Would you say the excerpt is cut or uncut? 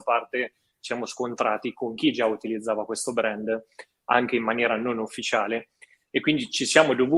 uncut